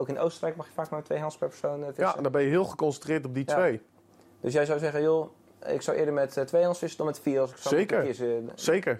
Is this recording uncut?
yes; 0 cuts

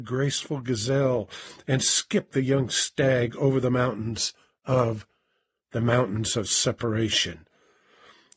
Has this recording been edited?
yes; 2 cuts; at 2.3 s, 5.6 s

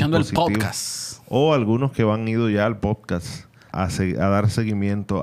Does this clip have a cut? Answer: yes; 1 cut; at 3.7 s

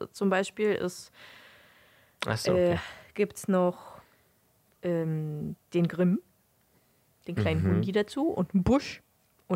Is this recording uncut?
yes; 0 cuts

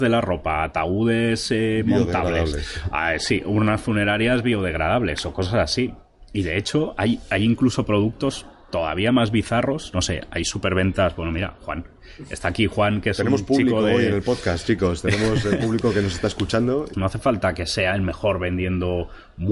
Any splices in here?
yes; 1 cut; at 16.9 s

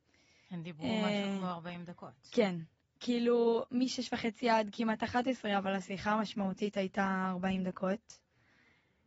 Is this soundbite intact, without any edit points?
yes; 0 cuts

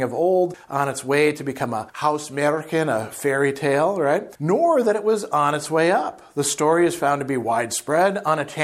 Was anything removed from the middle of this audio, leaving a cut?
no; 0 cuts

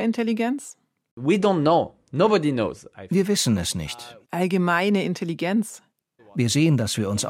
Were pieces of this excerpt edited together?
yes; 2 cuts; at 4.2 s, 6.2 s

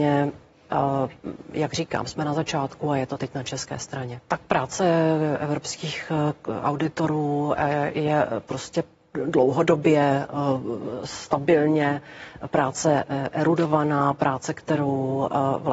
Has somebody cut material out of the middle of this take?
yes; 1 cut; at 4.3 s

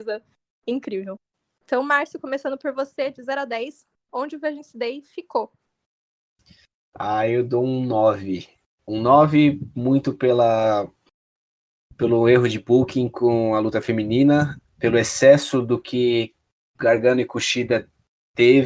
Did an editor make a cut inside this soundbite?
no; 0 cuts

